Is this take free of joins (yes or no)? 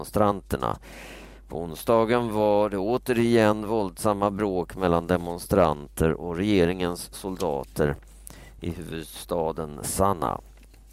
yes